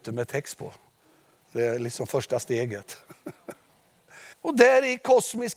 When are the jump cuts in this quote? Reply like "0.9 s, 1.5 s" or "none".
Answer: 4.3 s